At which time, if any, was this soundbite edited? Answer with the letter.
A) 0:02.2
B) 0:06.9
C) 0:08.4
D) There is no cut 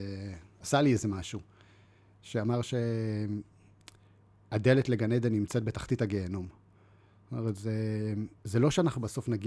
C